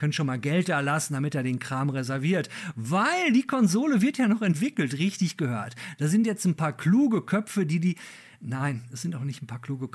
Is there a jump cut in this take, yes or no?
no